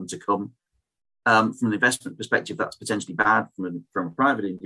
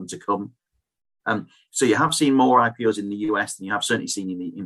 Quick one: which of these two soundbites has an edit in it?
second; 1 cut; at 1.2 s

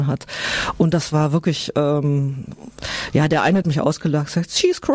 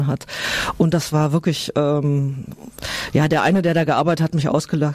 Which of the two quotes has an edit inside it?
first; 1 cut; at 3.6 s

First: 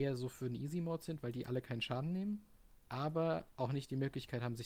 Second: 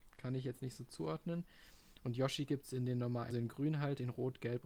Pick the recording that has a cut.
second; 1 cut; at 3.3 s

